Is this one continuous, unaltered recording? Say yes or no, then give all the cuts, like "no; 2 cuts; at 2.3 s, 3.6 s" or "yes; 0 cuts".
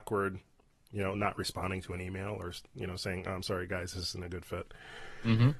yes; 0 cuts